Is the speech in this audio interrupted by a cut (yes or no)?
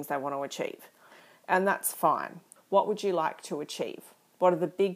yes